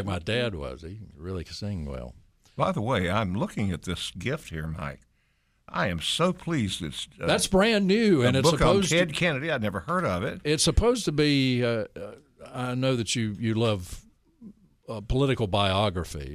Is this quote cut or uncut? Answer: uncut